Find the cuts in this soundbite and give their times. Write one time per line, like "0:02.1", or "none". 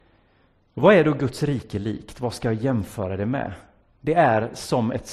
none

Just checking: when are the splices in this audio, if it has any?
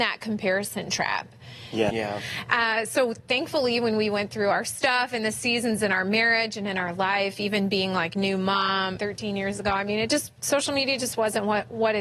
0:01.9
0:09.0

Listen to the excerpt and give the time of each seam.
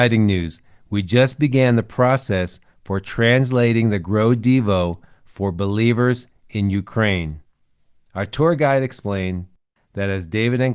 0:08.0

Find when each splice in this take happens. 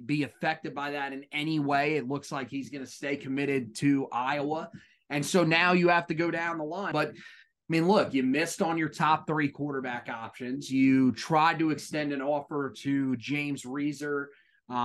0:06.9

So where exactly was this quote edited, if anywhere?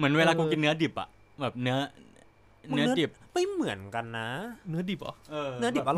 none

